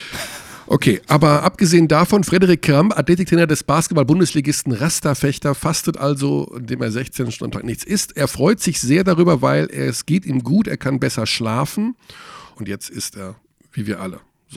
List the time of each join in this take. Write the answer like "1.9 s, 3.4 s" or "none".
12.5 s